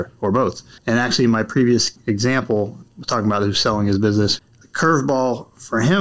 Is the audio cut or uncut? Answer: uncut